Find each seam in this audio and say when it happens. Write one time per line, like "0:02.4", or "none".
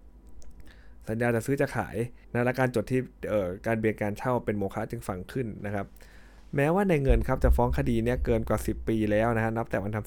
0:02.2